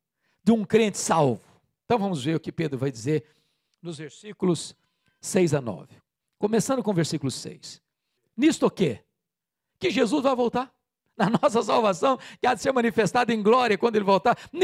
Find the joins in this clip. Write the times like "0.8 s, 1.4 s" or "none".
8.2 s